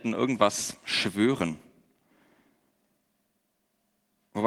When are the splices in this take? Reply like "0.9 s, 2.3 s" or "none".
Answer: none